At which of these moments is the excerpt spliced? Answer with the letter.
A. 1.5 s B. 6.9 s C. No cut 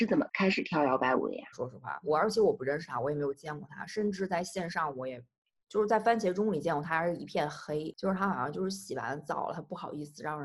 A